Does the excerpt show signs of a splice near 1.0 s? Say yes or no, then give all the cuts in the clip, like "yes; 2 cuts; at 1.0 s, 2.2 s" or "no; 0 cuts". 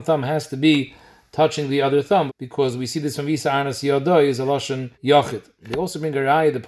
no; 2 cuts; at 2.3 s, 4.9 s